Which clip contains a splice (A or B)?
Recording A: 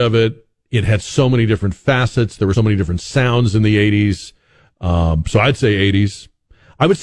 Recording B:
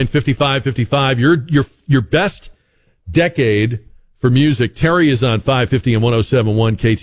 A